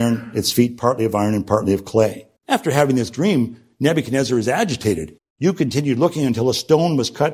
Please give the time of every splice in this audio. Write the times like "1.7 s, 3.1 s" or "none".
2.4 s, 5.2 s